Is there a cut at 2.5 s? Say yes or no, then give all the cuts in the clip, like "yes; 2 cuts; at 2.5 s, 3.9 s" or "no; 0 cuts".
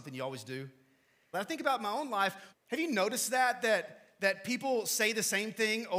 yes; 2 cuts; at 1.3 s, 2.5 s